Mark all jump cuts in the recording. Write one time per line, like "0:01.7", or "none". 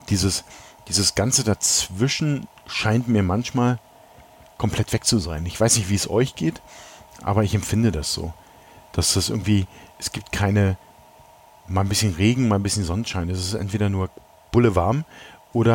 none

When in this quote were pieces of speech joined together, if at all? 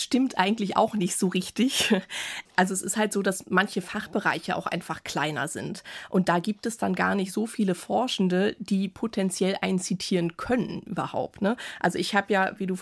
none

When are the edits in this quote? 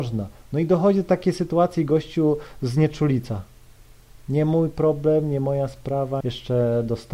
0:06.2

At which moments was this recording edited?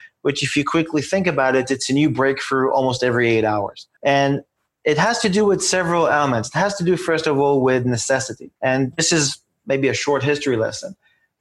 0:04.0
0:08.6

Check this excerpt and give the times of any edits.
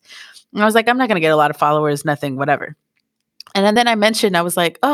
none

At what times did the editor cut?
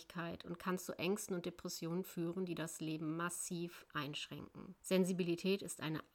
0:04.8

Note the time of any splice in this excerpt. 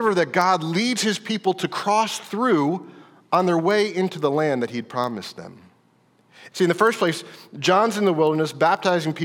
0:06.5

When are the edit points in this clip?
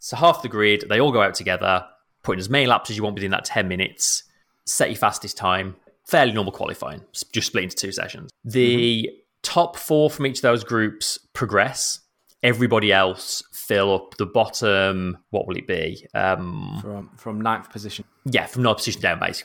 0:15.2

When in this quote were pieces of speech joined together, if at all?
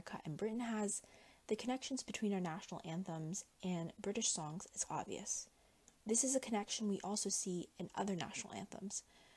0:04.8

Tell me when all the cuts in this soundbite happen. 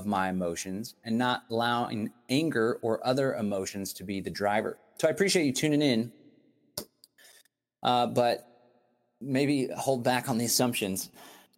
none

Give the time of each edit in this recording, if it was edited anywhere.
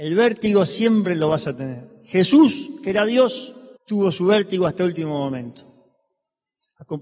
0:03.8

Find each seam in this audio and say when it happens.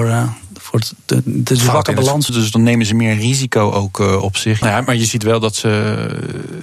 0:02.3
0:04.6

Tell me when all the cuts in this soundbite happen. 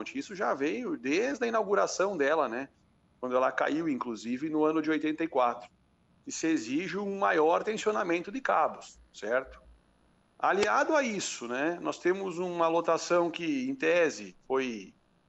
0:06.1

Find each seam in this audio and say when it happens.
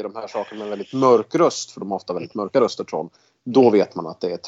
none

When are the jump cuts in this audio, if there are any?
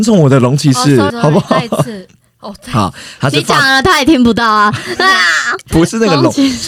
0:01.1

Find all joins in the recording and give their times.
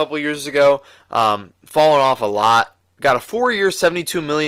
none

